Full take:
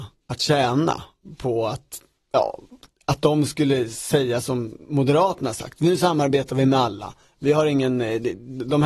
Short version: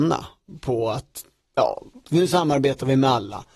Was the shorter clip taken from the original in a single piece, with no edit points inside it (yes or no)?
no